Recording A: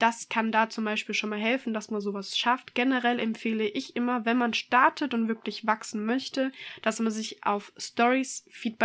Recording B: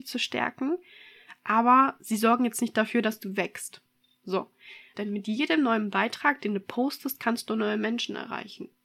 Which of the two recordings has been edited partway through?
B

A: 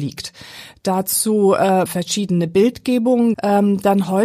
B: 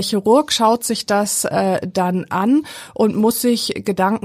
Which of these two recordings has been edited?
A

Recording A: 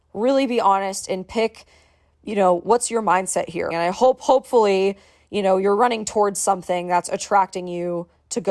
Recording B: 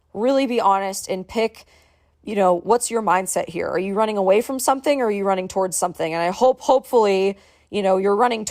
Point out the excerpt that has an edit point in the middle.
A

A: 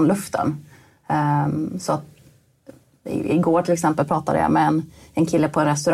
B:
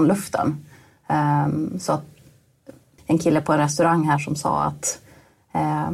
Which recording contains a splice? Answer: B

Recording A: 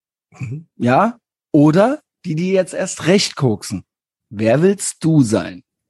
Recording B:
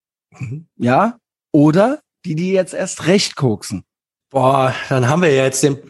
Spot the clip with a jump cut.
B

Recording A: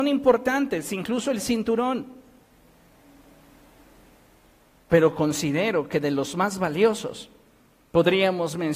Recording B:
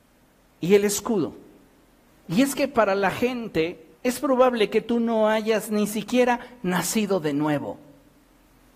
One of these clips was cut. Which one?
B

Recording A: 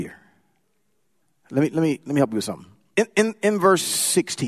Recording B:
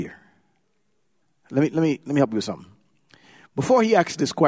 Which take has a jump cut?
A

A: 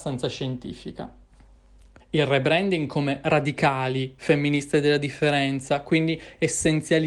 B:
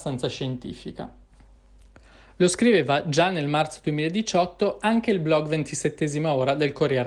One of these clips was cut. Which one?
A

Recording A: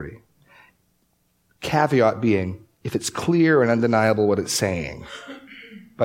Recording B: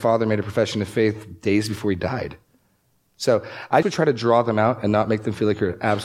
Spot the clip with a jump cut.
B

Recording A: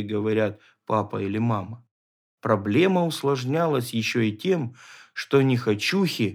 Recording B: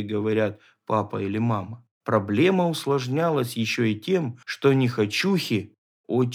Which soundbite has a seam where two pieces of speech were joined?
B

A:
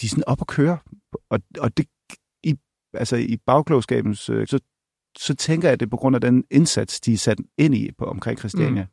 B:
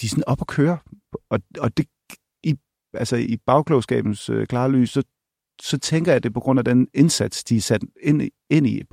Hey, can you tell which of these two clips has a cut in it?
A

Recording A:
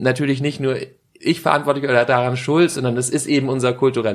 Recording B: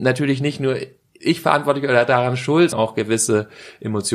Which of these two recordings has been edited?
B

